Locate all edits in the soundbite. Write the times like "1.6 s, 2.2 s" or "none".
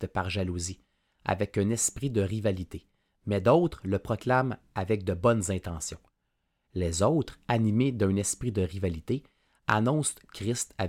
6.6 s

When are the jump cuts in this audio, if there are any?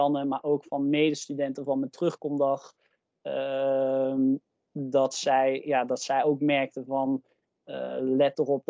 none

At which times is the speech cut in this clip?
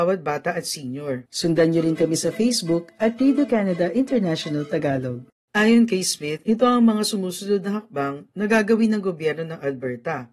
1.3 s

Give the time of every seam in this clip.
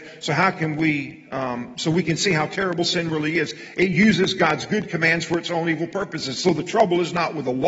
none

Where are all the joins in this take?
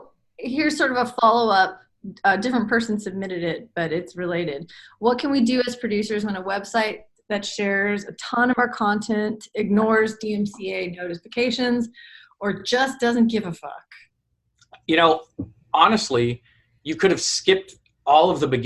none

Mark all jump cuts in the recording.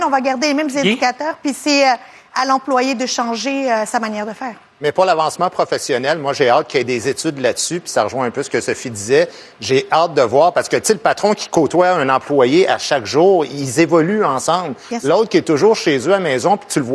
none

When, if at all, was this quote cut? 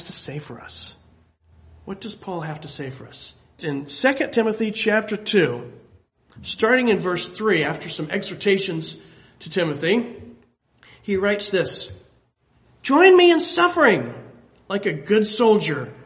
3.6 s

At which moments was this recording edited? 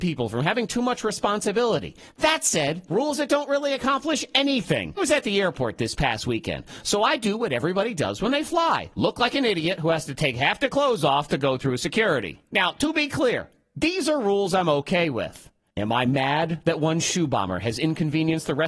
2.9 s, 5.0 s

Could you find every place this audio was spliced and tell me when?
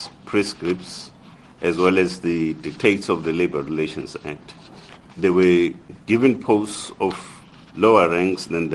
5.1 s

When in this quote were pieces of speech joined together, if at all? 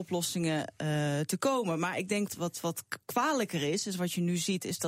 2.3 s

